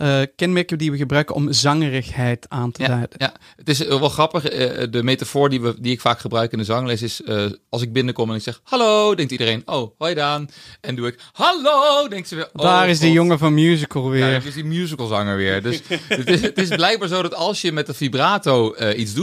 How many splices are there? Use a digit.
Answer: 0